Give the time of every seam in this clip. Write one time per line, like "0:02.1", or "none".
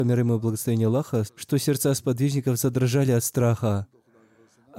0:01.3